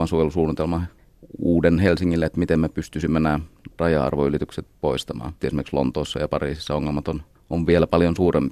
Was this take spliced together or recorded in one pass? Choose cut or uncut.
cut